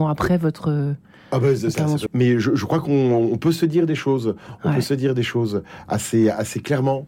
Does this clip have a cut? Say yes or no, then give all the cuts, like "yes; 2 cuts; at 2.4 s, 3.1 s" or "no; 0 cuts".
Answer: yes; 1 cut; at 2.1 s